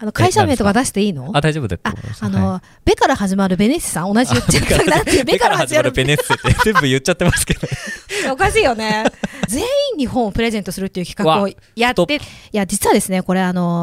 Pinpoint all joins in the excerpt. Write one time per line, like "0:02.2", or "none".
0:09.5
0:12.2